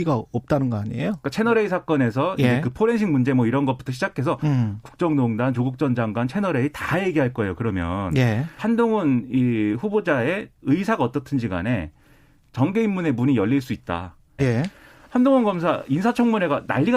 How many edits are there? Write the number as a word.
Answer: three